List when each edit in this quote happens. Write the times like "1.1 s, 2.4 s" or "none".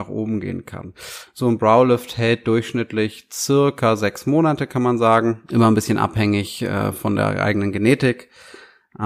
1.3 s